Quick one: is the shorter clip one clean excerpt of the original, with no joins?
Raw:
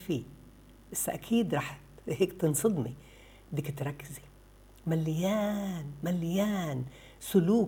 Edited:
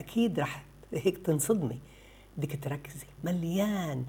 no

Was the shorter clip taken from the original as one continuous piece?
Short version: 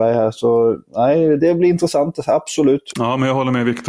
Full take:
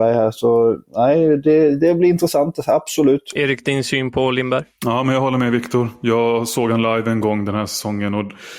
no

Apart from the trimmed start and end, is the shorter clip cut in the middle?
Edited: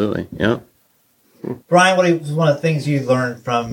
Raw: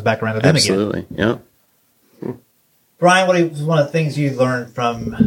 yes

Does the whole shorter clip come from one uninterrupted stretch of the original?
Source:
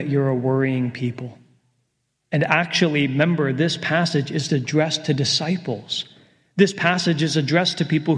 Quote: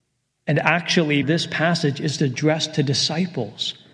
no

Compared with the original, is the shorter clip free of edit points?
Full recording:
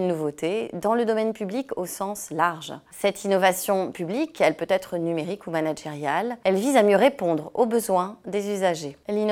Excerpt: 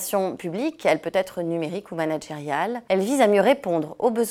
yes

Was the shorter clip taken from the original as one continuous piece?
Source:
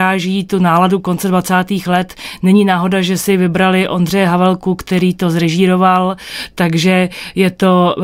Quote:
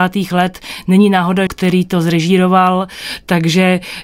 no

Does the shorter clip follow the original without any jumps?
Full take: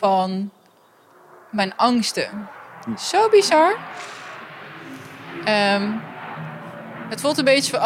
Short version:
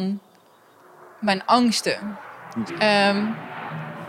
no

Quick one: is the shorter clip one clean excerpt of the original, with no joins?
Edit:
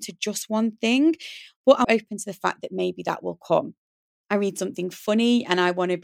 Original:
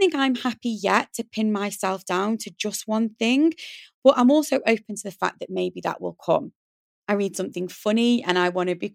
no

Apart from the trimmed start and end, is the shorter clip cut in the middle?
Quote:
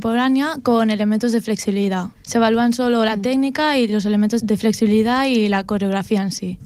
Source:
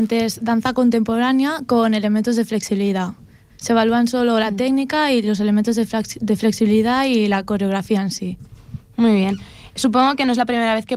yes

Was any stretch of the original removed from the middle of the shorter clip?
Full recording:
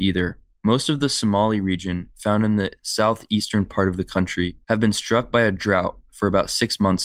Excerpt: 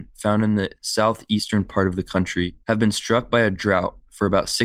no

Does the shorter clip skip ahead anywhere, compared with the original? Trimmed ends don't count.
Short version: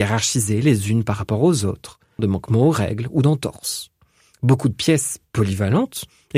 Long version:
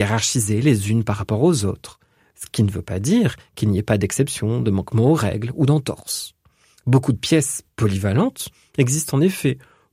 yes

